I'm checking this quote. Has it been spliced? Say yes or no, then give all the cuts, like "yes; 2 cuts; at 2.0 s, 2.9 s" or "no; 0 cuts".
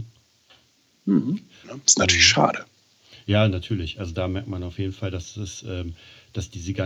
yes; 1 cut; at 1.6 s